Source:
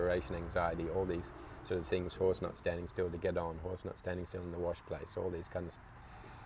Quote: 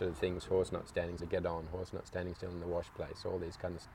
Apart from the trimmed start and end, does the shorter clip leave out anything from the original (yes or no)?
yes